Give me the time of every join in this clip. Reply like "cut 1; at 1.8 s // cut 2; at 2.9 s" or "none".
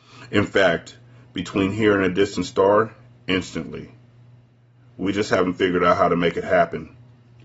none